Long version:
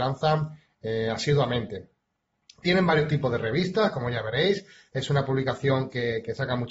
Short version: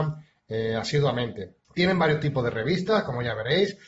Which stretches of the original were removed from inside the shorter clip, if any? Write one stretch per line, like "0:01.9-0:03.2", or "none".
0:02.0-0:02.5